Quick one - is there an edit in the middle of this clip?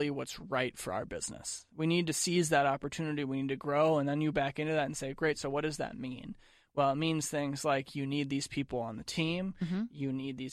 no; 0 cuts

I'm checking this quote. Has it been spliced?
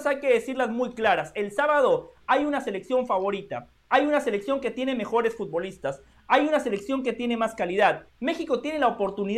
yes; 1 cut; at 8.1 s

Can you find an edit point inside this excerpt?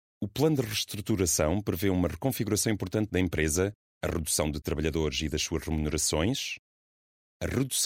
yes; 1 cut; at 3.8 s

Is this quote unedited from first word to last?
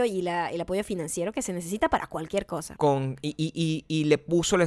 no; 1 cut; at 2.8 s

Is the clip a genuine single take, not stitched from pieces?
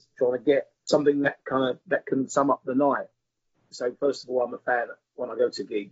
no; 1 cut; at 3.7 s

